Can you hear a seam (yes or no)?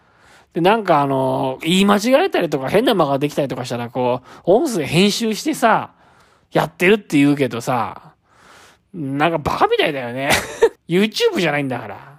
yes